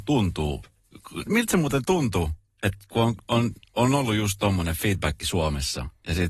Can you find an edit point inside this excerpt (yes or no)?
yes